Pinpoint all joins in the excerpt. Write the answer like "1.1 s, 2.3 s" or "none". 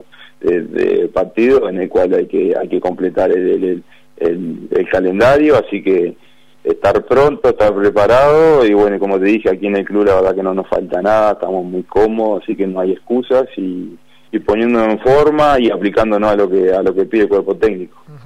none

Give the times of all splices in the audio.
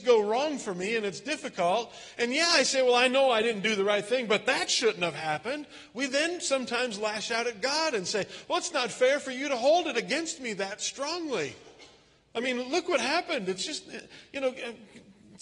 none

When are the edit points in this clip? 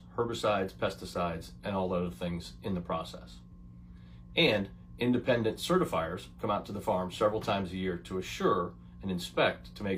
4.3 s

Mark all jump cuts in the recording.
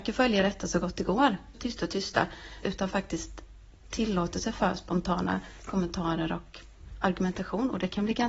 1.5 s, 2.6 s

